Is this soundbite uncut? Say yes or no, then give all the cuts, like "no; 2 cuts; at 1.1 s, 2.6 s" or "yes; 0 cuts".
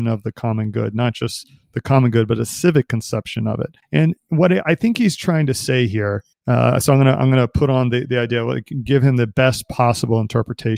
yes; 0 cuts